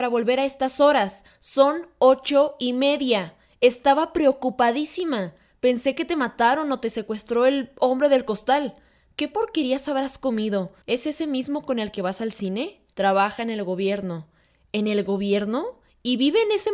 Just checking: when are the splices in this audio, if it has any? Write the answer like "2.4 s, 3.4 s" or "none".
10.8 s, 12.9 s